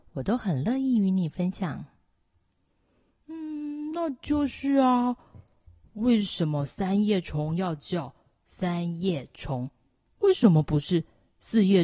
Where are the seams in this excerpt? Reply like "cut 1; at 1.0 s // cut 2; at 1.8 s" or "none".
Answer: none